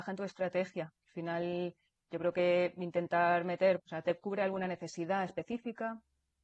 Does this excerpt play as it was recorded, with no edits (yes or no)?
no